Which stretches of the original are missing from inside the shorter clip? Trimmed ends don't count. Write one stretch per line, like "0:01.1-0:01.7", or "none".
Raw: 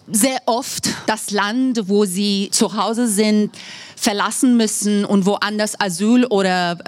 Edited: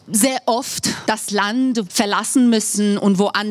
0:01.9-0:03.9